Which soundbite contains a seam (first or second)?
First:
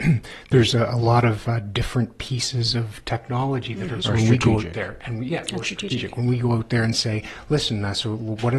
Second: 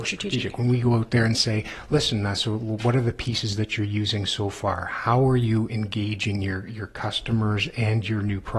first